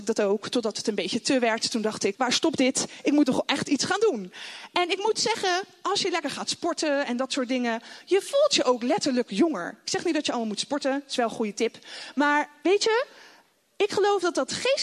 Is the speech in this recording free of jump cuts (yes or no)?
no